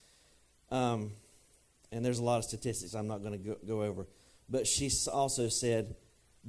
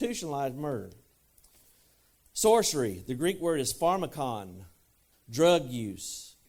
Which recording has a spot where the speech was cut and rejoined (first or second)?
second